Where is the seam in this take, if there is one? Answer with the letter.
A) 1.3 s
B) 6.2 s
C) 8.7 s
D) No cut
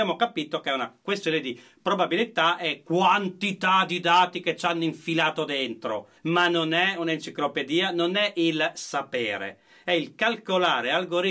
B